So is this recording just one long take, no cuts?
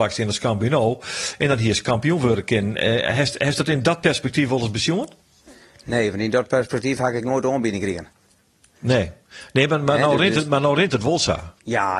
yes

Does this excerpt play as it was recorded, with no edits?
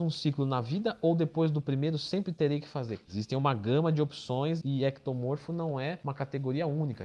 no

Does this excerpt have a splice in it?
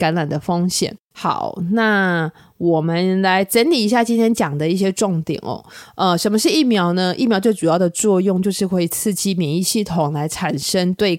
no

